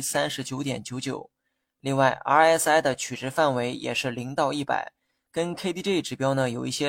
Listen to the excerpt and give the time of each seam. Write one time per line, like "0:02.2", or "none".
none